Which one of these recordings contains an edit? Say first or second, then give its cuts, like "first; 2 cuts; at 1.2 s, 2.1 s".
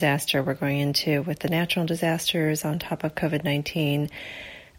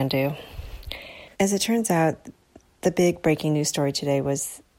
second; 1 cut; at 1.3 s